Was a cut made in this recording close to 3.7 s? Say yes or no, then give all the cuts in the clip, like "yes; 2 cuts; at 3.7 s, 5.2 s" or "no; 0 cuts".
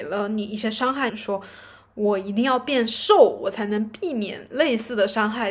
no; 1 cut; at 1.1 s